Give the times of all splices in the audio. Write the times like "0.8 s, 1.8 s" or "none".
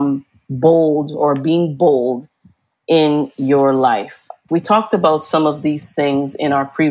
4.5 s